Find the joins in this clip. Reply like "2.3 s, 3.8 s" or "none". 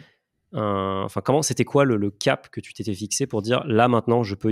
none